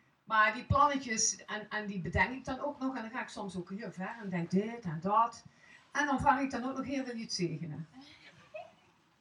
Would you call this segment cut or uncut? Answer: cut